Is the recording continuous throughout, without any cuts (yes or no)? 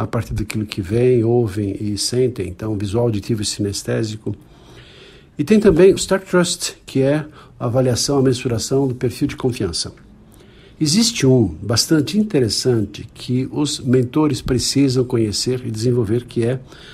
no